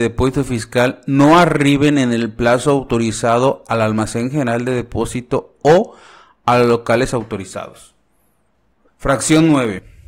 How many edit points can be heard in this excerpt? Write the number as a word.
one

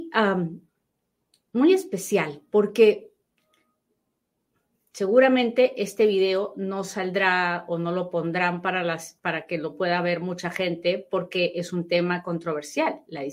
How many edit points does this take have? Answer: one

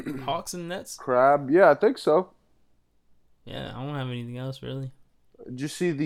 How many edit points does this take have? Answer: zero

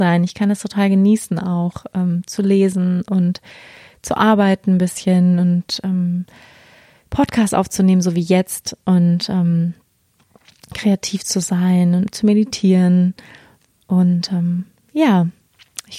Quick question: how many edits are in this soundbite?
zero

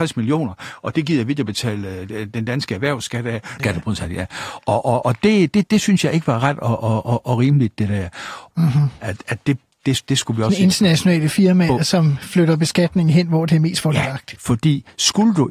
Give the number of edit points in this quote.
three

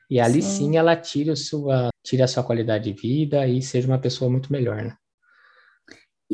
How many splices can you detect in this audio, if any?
one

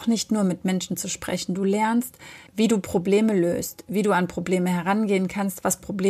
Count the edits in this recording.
one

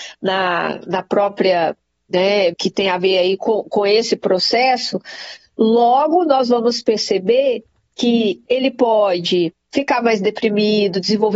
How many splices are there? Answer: one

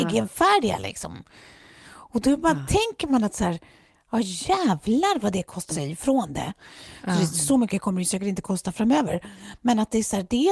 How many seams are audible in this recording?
one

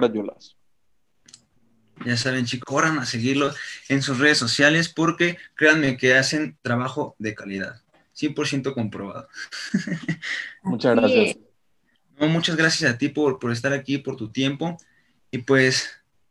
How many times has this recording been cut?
one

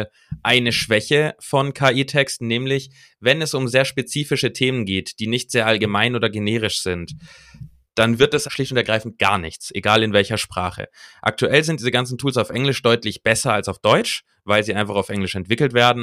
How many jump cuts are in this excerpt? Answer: one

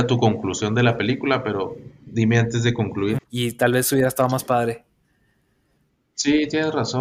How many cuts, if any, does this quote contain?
one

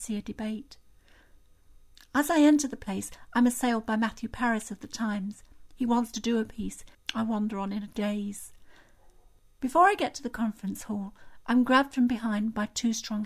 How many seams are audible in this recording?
one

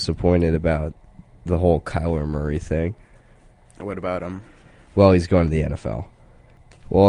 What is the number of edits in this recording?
zero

